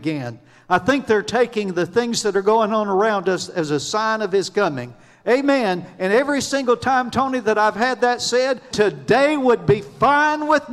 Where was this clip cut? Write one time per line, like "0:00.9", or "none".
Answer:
0:08.7